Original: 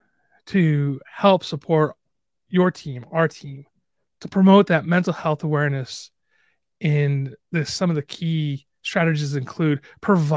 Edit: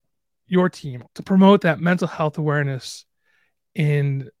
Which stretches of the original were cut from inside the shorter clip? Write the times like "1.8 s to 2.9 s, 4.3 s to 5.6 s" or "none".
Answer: 3.1 s to 4.1 s